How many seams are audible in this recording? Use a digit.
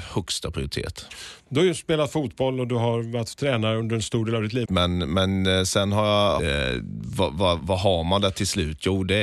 3